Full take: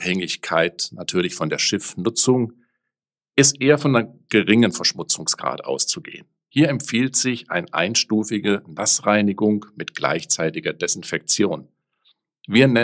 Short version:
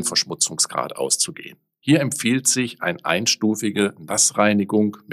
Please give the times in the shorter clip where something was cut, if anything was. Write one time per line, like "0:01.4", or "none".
none